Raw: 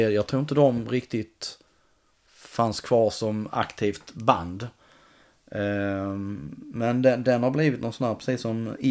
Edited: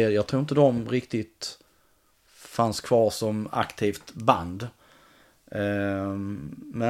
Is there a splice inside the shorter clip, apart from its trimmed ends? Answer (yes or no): no